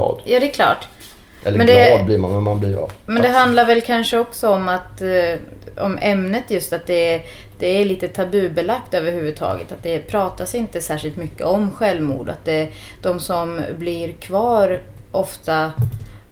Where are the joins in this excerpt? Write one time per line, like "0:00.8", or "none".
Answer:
none